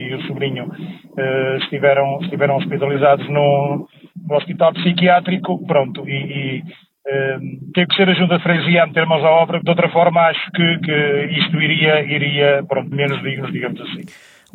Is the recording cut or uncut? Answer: cut